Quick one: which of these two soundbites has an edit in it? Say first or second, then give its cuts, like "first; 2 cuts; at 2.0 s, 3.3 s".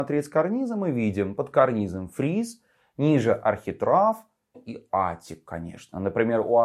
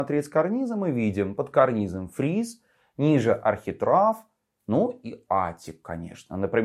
first; 1 cut; at 4.5 s